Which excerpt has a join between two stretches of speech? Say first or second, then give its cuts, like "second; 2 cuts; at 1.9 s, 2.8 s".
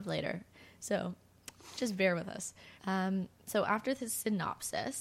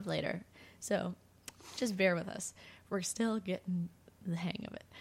first; 1 cut; at 2.8 s